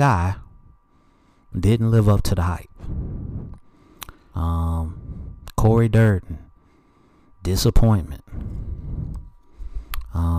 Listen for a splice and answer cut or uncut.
cut